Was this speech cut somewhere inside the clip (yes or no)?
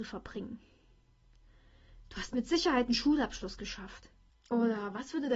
yes